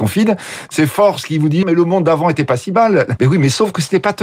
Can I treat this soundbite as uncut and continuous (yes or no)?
no